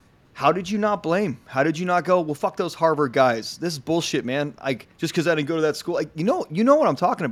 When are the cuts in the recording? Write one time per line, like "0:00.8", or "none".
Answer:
none